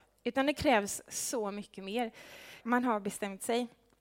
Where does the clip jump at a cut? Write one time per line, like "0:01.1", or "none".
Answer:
0:02.6